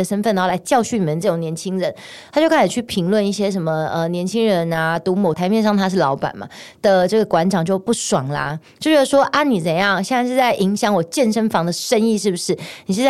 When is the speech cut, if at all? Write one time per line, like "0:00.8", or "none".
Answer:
0:05.3